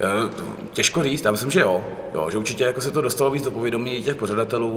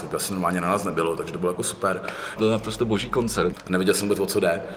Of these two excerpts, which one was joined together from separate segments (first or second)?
second